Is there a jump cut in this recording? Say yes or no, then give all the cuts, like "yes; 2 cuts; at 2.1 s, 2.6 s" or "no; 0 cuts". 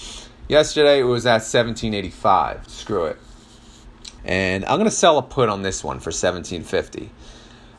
yes; 2 cuts; at 2.7 s, 4.2 s